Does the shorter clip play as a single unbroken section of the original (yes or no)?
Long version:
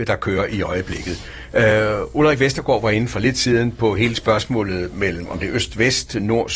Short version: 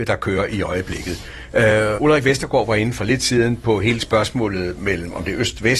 no